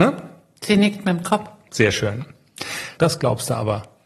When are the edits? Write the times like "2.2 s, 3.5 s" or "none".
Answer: 1.7 s, 3.0 s